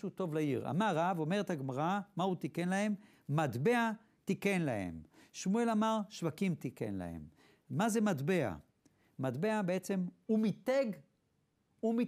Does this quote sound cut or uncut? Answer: uncut